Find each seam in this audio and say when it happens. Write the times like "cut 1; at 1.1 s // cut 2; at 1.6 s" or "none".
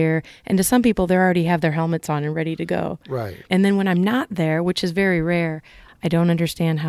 cut 1; at 3.5 s // cut 2; at 5.9 s